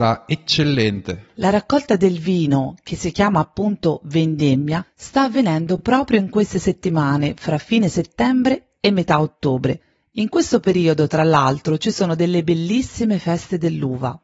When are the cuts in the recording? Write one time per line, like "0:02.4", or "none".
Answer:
none

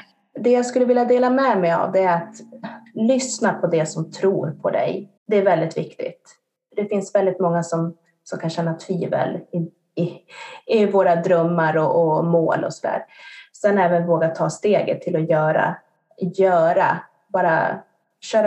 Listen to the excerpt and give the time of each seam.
0:05.2

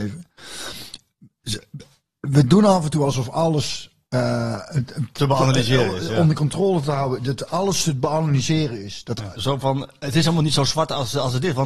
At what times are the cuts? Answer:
0:09.3

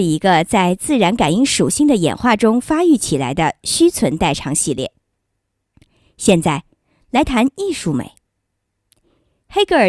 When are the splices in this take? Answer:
none

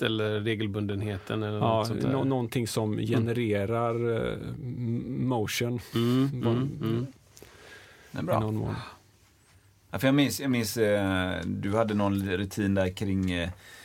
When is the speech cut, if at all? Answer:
none

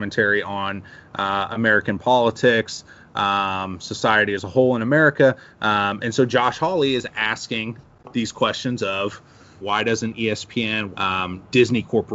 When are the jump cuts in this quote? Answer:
0:05.6
0:09.6
0:10.9

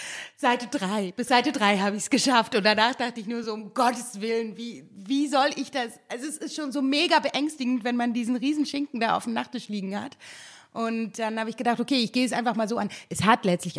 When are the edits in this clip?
none

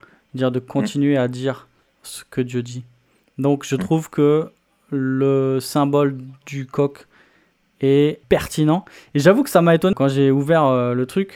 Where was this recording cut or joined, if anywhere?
0:08.2
0:09.9

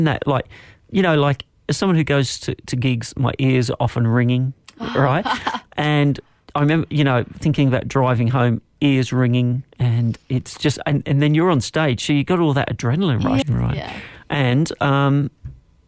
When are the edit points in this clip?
0:09.7
0:13.4

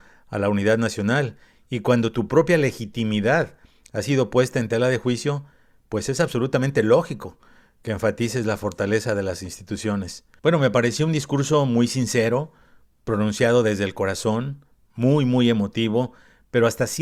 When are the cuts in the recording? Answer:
0:10.4

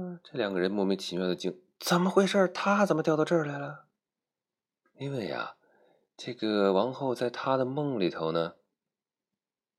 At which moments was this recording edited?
0:04.8

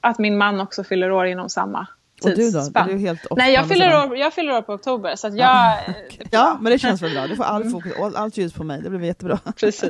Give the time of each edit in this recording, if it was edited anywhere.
0:06.3

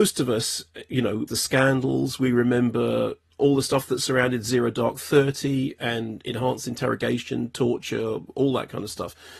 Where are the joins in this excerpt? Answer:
0:01.3

